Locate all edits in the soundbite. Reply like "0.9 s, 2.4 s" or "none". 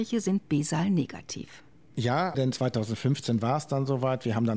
2.3 s